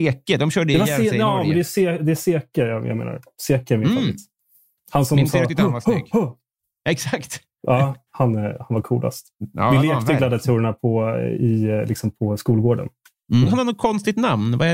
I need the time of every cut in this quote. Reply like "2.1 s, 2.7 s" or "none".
8.1 s, 13.4 s